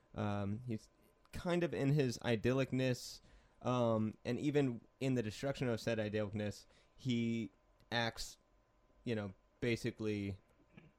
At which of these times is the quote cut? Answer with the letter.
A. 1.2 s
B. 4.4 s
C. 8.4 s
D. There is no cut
D